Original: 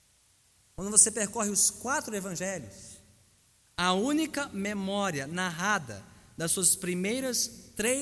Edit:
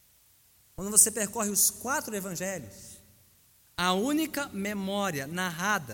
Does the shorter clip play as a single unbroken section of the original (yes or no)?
yes